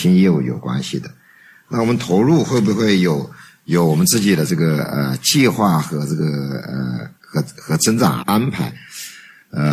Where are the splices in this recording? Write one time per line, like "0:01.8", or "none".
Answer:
0:07.1
0:08.2